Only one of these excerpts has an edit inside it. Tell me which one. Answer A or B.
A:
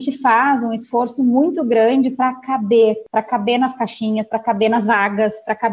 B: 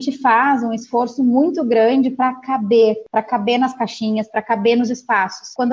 B